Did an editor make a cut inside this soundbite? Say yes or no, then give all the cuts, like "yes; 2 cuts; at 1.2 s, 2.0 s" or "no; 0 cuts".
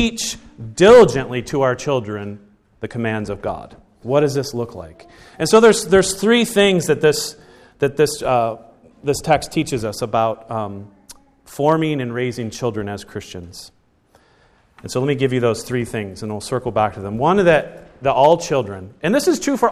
yes; 1 cut; at 4.0 s